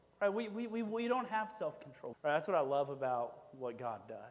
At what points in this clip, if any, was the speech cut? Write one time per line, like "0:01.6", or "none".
0:02.1